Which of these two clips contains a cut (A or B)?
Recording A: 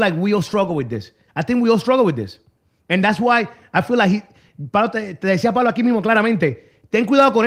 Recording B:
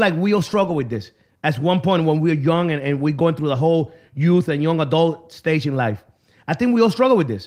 A